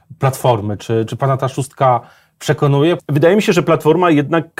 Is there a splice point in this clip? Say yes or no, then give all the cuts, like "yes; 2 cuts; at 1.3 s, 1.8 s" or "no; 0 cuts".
yes; 1 cut; at 3.0 s